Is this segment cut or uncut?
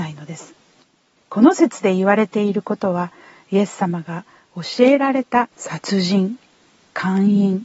cut